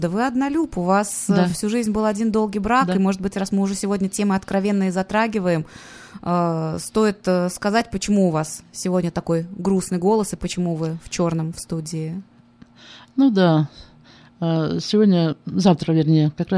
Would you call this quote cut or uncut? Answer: uncut